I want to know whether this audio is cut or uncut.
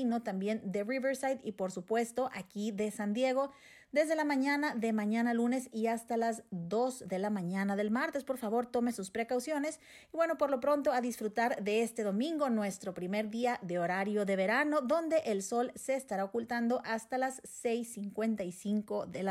uncut